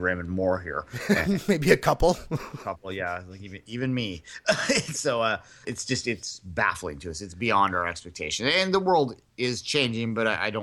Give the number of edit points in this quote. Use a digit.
1